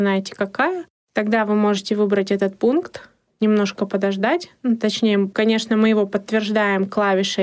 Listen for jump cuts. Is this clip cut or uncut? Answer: uncut